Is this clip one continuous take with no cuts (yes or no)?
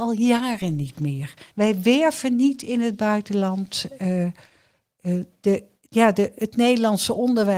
yes